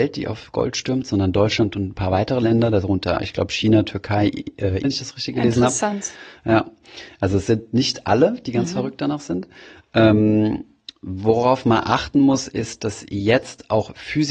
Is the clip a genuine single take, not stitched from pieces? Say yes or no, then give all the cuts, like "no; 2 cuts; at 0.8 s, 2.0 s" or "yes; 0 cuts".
no; 1 cut; at 4.8 s